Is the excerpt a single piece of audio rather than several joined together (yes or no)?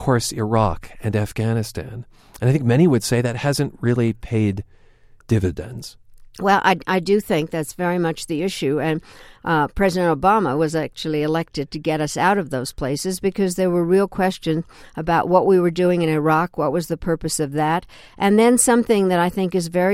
yes